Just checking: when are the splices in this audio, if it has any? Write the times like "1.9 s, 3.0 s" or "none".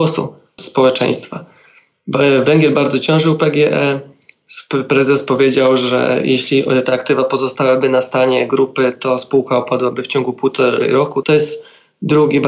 11.2 s